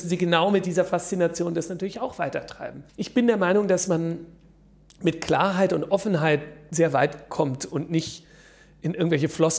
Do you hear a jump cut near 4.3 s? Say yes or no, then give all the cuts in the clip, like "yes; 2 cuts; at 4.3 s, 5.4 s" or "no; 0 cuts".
no; 1 cut; at 2.9 s